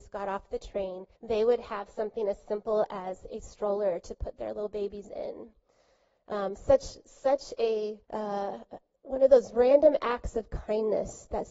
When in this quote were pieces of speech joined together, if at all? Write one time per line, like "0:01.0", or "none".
0:01.2
0:08.0